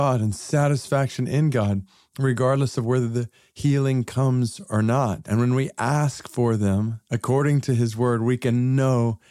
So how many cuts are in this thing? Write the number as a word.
one